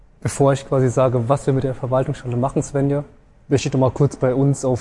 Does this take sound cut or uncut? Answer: uncut